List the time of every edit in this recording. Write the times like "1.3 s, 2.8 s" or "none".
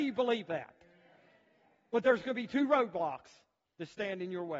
none